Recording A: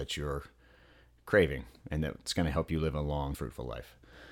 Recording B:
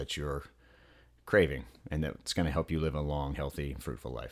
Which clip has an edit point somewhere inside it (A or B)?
A